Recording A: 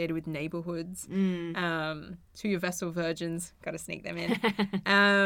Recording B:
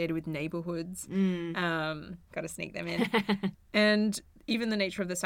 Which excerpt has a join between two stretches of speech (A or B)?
B